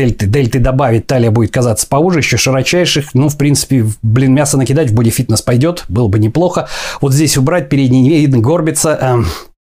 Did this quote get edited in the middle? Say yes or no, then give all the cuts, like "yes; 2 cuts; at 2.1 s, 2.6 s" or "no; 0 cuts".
no; 0 cuts